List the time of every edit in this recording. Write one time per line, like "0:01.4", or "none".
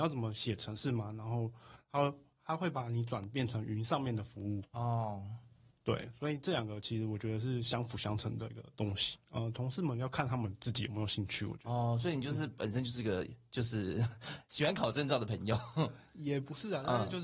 0:09.2

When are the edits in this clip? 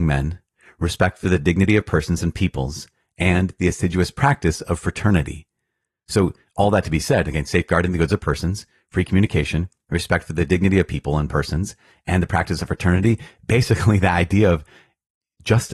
none

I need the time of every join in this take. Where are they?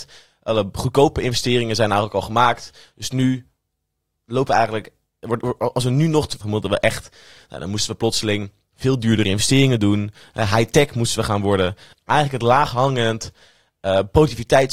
0:06.4
0:11.9

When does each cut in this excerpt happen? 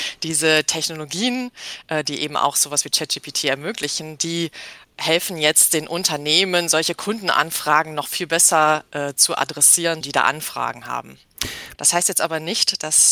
0:10.0
0:11.7

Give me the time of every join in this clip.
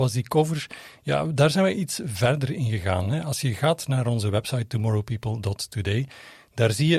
none

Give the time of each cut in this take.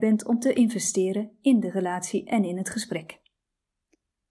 none

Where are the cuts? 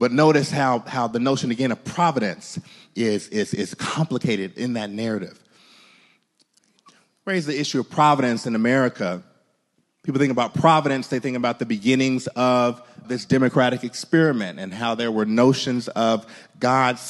0:09.8
0:13.0

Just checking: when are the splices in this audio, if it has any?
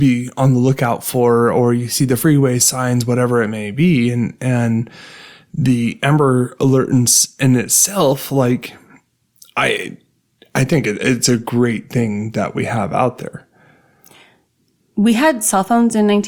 none

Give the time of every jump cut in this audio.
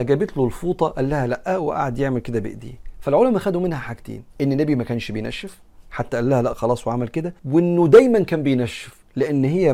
0:04.3
0:07.4

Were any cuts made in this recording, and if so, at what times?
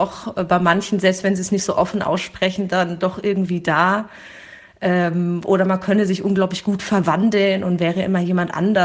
none

